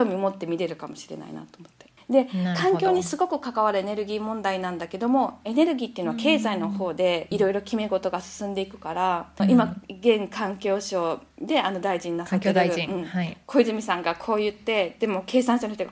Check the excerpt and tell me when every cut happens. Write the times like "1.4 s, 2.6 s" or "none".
2.0 s, 9.4 s